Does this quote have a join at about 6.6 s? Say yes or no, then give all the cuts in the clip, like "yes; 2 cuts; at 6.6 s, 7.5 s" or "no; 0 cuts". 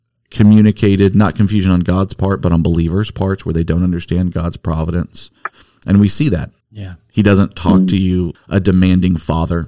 yes; 2 cuts; at 6.6 s, 8.3 s